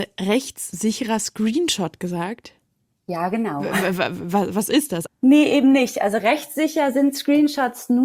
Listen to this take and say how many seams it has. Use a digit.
1